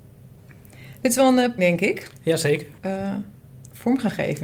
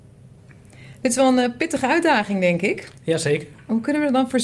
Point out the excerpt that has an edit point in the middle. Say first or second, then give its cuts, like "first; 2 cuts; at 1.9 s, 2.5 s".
first; 2 cuts; at 1.6 s, 2.8 s